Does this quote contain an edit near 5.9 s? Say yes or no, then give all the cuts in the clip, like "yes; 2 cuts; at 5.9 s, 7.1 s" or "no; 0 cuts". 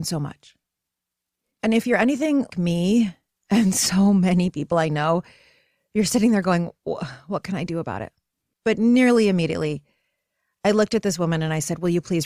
no; 2 cuts; at 2.5 s, 8.5 s